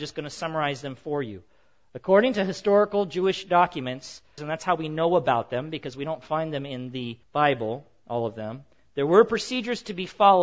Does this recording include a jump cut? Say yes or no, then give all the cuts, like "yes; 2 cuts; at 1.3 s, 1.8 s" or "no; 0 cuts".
yes; 2 cuts; at 4.4 s, 7.2 s